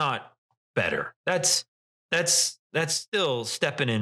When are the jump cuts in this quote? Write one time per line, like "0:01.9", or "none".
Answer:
none